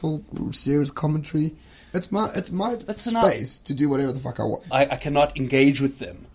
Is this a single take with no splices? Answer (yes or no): no